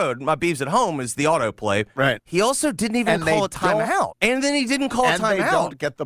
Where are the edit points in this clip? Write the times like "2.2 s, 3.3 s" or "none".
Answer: 2.2 s, 4.1 s